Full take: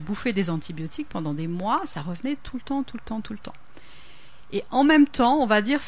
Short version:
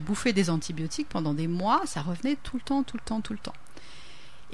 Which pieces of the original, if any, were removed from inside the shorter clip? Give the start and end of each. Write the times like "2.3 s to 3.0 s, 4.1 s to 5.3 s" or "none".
none